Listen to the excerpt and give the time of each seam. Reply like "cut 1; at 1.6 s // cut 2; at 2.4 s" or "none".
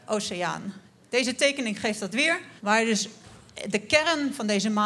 cut 1; at 2.6 s